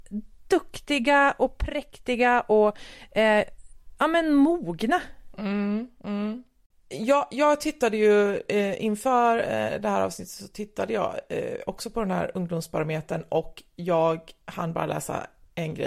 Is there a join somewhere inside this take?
no; 0 cuts

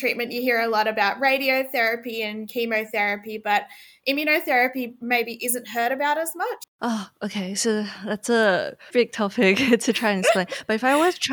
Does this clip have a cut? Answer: yes; 2 cuts; at 6.6 s, 8.9 s

